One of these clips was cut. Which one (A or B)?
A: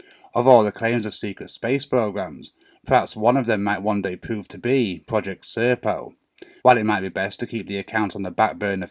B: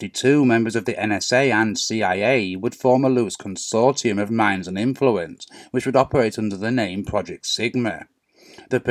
A